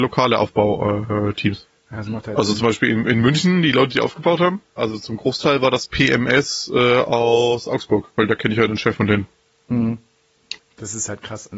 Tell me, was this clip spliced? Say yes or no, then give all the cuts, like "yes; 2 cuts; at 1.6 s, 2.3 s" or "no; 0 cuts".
yes; 2 cuts; at 4.8 s, 10.6 s